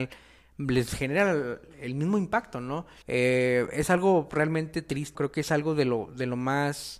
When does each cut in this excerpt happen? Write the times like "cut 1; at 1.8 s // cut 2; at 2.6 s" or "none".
cut 1; at 3.0 s // cut 2; at 5.1 s